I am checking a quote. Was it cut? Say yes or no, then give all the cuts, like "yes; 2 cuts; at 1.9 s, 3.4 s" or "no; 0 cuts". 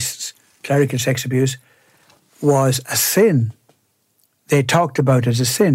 no; 0 cuts